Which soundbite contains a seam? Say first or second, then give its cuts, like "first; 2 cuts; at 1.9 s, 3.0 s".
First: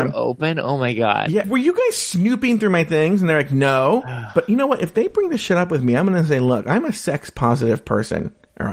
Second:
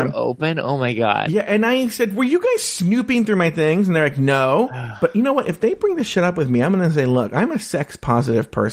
first; 1 cut; at 1.4 s